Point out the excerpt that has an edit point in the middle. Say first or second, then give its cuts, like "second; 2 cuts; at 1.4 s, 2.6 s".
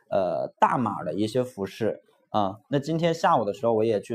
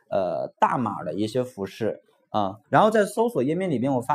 second; 1 cut; at 2.6 s